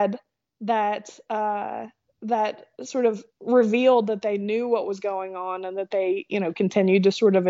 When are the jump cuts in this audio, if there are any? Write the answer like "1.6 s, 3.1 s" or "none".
3.3 s